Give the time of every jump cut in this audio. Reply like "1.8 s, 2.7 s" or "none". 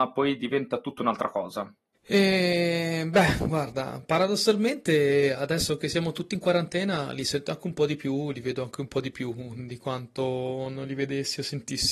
1.9 s